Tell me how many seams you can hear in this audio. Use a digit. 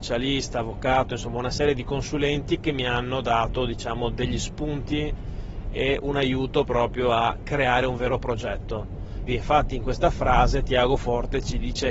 1